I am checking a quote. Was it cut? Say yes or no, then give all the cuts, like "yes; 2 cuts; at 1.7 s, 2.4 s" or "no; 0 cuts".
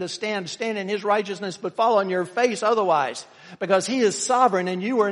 no; 0 cuts